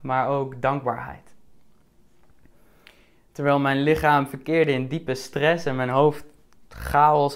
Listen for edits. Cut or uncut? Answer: uncut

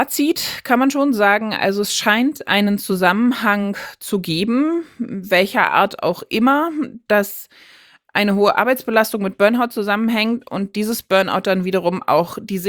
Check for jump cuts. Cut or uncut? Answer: uncut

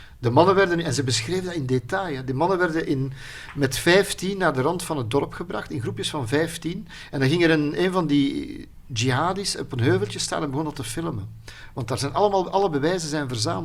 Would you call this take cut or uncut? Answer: uncut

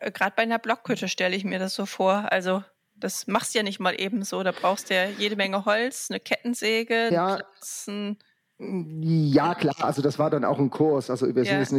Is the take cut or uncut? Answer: cut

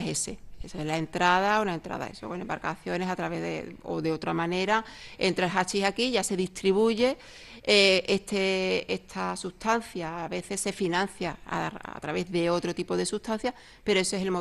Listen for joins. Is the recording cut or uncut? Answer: uncut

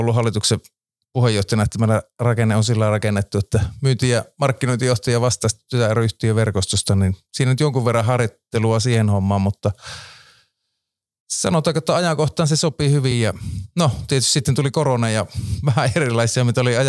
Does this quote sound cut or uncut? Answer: uncut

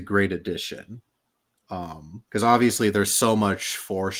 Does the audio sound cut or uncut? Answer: cut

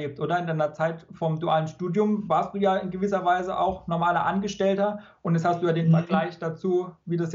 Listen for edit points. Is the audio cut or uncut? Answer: uncut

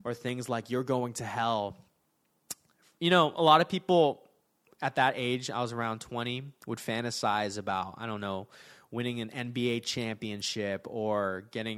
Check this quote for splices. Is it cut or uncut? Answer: uncut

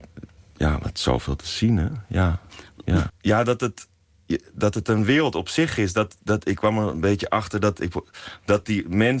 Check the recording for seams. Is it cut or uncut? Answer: cut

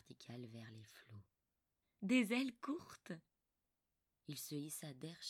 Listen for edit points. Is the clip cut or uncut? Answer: cut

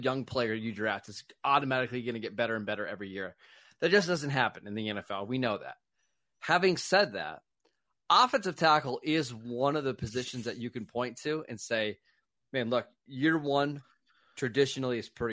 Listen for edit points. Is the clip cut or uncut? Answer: uncut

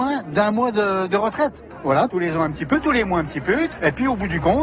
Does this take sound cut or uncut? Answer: uncut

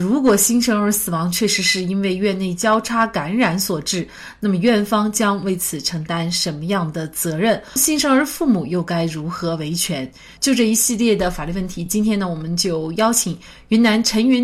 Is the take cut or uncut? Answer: uncut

